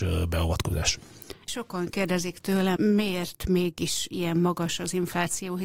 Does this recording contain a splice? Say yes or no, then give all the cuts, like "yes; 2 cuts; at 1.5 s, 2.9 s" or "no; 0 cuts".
yes; 2 cuts; at 1.5 s, 2.8 s